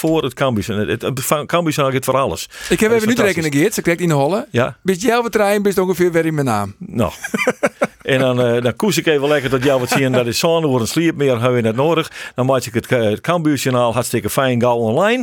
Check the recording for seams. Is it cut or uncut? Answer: uncut